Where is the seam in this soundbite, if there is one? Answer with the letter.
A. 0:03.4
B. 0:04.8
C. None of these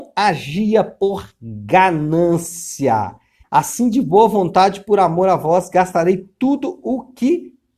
A